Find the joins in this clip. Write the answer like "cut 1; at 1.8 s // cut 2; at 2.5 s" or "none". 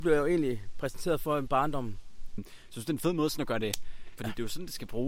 cut 1; at 2.4 s // cut 2; at 4.2 s